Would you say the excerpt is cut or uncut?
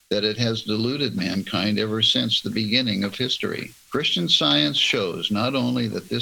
cut